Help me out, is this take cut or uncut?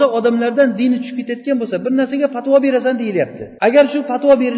cut